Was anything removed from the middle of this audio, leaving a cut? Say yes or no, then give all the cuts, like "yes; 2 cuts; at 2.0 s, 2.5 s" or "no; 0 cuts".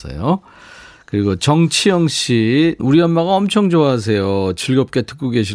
yes; 1 cut; at 2.8 s